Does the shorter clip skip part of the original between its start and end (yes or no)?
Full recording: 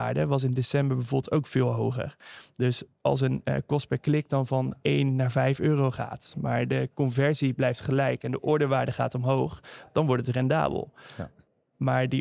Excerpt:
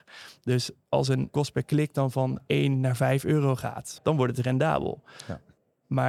yes